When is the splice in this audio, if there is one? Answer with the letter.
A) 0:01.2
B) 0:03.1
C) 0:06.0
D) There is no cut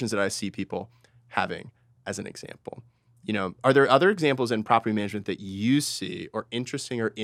D